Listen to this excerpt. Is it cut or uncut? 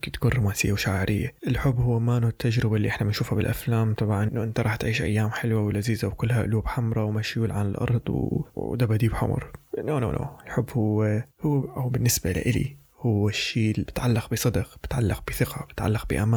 uncut